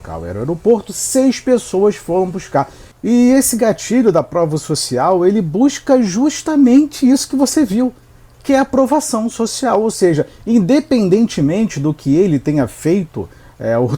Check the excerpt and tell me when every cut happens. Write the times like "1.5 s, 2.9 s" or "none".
2.9 s